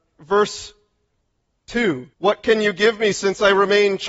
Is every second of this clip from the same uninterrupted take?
no; 1 cut; at 2.1 s

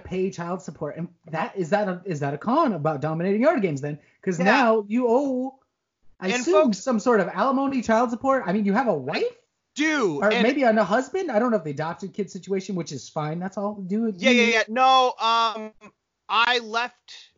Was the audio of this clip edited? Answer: no; 0 cuts

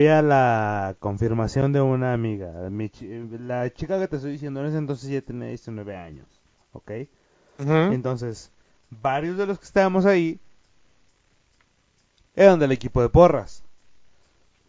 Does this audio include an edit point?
no; 0 cuts

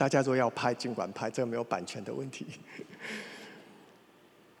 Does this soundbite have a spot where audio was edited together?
no; 0 cuts

